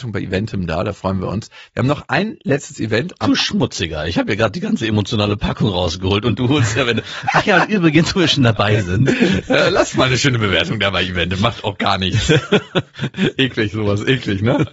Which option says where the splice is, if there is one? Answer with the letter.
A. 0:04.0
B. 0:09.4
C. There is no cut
C